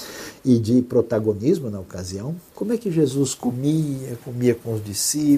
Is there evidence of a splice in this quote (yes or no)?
yes